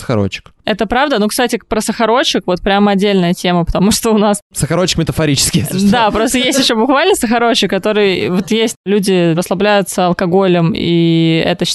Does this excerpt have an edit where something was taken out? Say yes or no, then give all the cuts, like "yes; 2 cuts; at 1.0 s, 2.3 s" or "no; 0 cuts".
yes; 1 cut; at 9.4 s